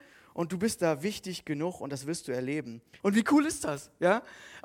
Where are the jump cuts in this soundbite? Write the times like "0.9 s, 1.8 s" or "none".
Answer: 3.0 s

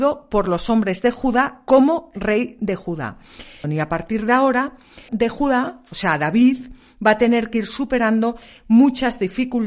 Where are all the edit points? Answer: 3.6 s, 5.1 s

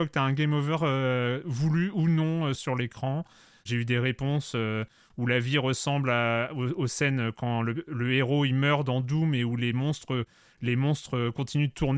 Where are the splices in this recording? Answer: 2.6 s

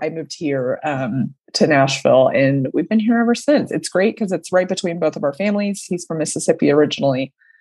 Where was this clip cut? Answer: none

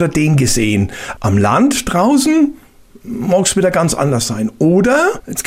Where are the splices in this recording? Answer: 1.2 s

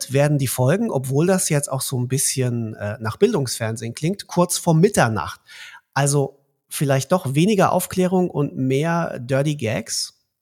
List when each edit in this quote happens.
none

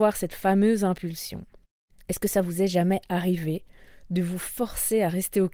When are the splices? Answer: 2.0 s

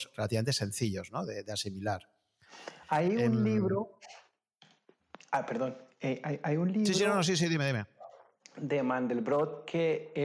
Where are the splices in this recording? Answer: none

